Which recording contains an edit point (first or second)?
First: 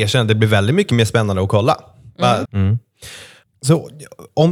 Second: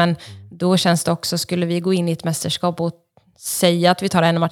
first